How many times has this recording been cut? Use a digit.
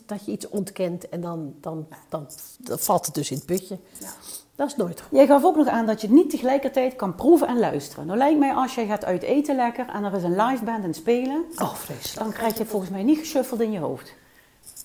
0